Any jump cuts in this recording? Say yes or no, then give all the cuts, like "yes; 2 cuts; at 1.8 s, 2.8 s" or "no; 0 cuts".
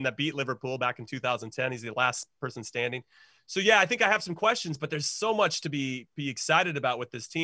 no; 0 cuts